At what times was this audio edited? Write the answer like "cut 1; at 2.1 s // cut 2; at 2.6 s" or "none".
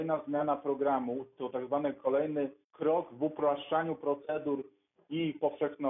cut 1; at 2.6 s